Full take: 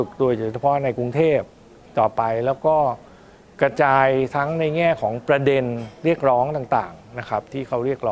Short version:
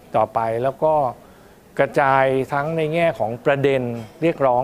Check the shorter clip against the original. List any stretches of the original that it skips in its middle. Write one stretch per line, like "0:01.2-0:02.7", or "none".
none